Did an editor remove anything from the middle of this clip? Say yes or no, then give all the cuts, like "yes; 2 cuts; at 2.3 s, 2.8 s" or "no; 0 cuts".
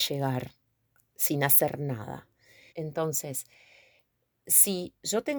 yes; 1 cut; at 2.7 s